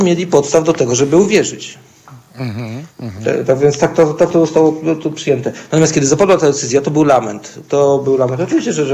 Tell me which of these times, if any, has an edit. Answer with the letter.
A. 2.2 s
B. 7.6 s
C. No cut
C